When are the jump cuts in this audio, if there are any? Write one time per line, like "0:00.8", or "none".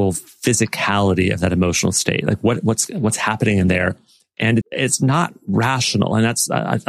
0:04.6